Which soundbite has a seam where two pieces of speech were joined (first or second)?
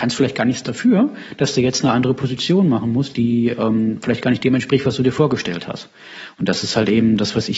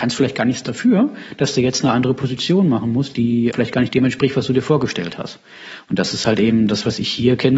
second